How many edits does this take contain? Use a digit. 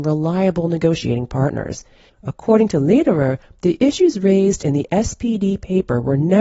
1